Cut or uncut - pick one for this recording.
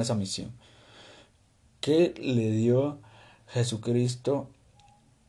uncut